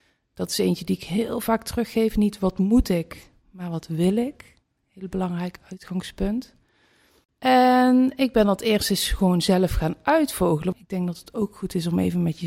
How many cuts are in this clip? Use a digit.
2